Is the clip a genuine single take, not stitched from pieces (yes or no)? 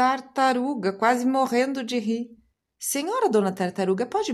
yes